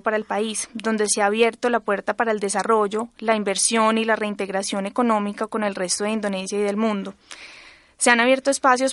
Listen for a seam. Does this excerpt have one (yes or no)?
no